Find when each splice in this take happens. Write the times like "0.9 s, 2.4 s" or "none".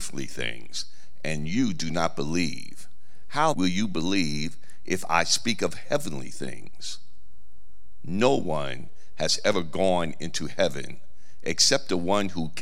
3.5 s

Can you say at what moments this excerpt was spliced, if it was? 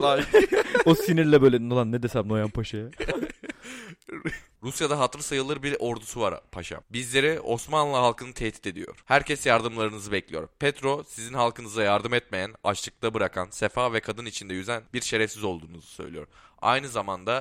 none

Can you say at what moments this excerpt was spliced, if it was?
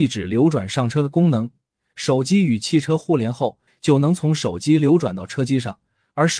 3.7 s

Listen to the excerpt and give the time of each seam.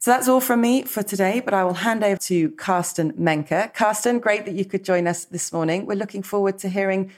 2.2 s

